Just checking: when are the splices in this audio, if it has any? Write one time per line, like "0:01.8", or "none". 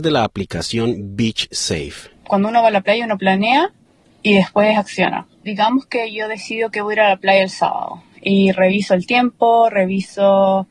none